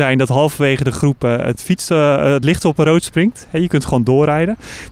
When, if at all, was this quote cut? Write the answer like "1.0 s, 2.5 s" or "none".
none

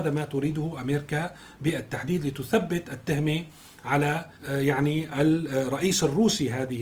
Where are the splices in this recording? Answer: 4.4 s

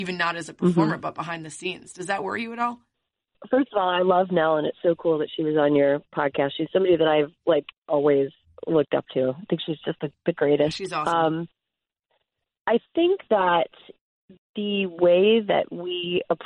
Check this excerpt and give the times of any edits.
none

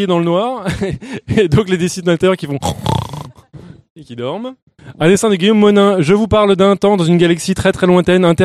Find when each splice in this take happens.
none

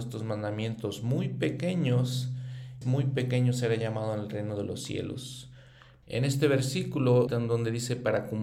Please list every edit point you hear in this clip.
2.8 s, 6.0 s, 7.3 s

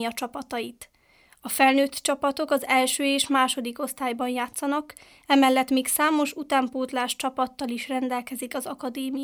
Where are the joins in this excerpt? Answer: none

